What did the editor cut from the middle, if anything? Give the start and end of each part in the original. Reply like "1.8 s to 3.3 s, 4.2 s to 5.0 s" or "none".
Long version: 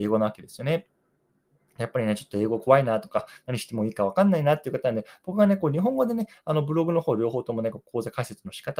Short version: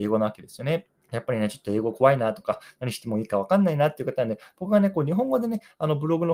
1.0 s to 1.6 s